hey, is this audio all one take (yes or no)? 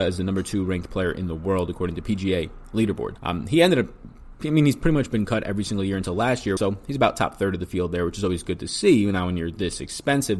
no